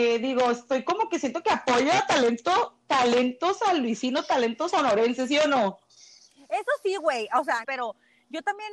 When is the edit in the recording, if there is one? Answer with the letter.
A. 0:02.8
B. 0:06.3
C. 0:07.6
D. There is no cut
C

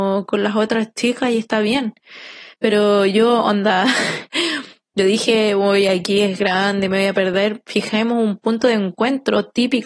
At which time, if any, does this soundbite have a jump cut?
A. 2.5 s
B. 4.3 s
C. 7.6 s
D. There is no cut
A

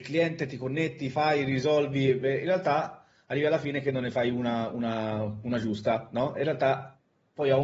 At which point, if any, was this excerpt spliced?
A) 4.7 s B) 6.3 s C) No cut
C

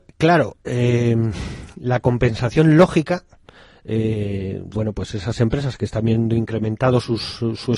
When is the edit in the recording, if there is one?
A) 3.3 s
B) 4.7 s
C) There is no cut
B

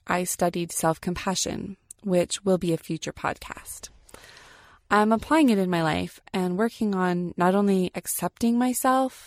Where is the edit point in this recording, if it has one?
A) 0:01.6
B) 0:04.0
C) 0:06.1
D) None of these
D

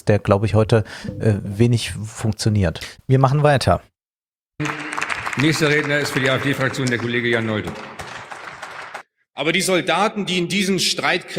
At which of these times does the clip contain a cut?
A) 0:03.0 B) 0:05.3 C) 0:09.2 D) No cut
A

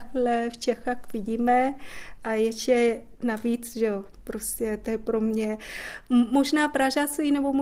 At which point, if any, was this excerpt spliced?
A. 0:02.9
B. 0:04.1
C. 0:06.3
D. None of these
B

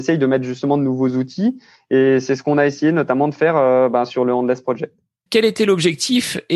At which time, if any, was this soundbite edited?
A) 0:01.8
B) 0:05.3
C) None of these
B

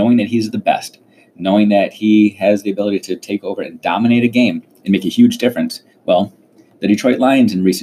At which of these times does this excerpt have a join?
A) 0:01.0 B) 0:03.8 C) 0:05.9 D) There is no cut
C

